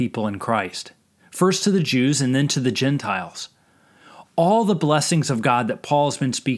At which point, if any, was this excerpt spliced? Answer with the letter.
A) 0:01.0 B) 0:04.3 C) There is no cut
C